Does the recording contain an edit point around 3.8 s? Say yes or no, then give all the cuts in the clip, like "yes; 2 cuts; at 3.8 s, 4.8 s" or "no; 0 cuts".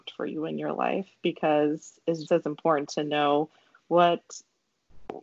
no; 1 cut; at 2.3 s